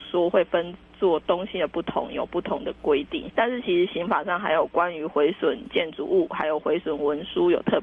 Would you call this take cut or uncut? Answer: cut